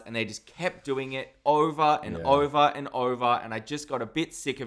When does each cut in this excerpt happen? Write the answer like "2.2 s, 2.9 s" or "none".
none